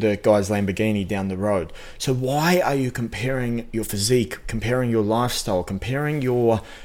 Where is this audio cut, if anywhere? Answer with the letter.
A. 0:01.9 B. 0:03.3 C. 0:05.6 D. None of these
D